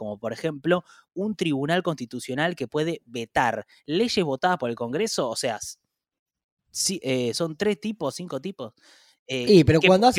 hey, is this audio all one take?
yes; 0 cuts

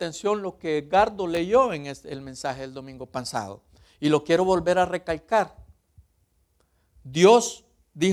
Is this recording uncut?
yes; 0 cuts

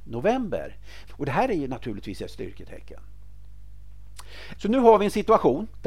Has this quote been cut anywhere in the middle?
yes; 2 cuts; at 1.1 s, 4.6 s

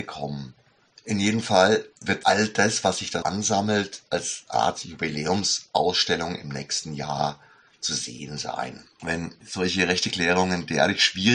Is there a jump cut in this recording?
yes; 2 cuts; at 3.2 s, 9.0 s

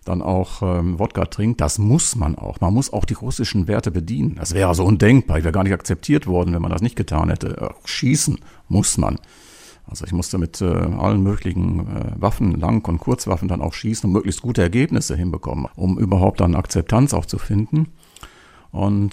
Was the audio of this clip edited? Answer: yes; 1 cut; at 15.7 s

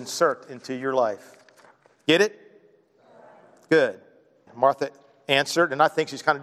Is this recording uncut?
no; 1 cut; at 4.5 s

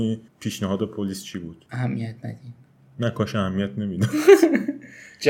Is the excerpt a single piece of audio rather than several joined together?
yes; 0 cuts

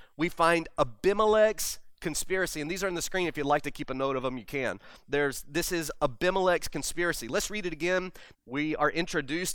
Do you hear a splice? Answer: yes; 1 cut; at 8.3 s

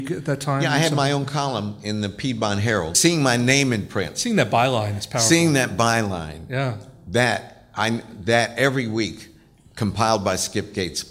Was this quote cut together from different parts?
no; 0 cuts

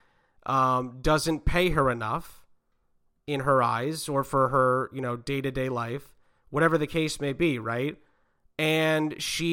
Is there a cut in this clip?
no; 0 cuts

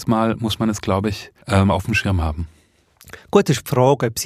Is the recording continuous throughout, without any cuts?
no; 1 cut; at 1.4 s

